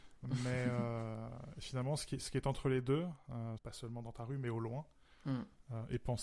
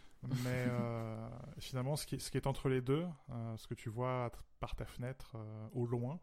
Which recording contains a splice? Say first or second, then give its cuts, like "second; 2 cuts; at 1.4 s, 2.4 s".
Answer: first; 1 cut; at 3.6 s